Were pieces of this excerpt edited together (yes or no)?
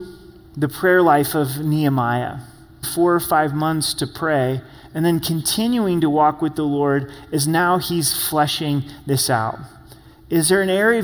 yes